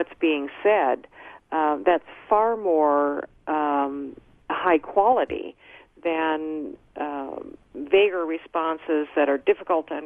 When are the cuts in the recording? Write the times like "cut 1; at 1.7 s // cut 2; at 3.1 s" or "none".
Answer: none